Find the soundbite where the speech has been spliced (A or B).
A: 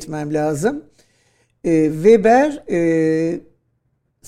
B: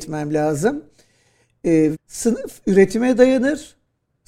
B